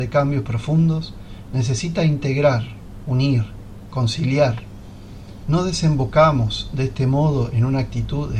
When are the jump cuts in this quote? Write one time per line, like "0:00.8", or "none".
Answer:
0:05.4